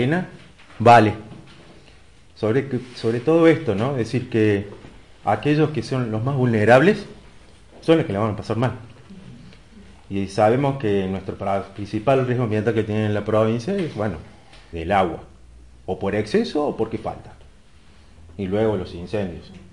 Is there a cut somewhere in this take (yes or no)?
yes